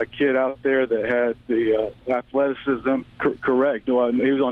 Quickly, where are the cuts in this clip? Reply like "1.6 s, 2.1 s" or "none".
3.0 s